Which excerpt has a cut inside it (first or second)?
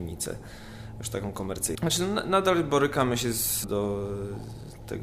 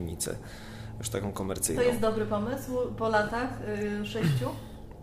first